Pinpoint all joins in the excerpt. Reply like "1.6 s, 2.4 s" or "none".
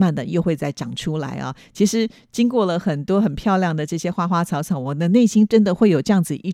none